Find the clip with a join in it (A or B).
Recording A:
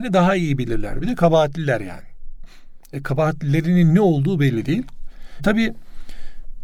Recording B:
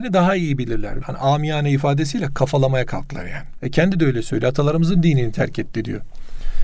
B